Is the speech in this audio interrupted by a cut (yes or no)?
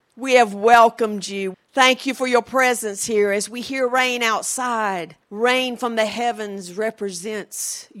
yes